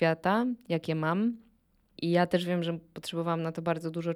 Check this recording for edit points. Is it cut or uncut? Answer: cut